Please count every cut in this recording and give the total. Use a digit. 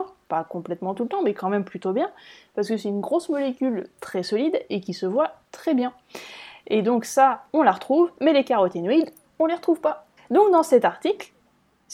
1